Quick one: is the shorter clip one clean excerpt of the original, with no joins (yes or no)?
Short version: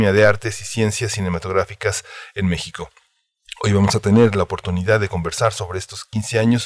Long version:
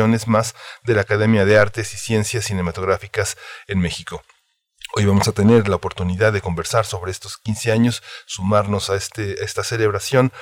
yes